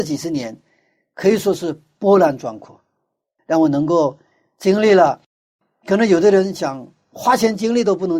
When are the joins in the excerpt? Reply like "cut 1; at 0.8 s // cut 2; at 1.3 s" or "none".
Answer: cut 1; at 3.4 s